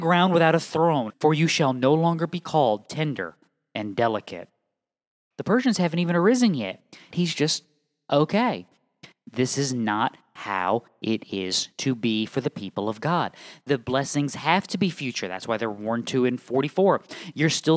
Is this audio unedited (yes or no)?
no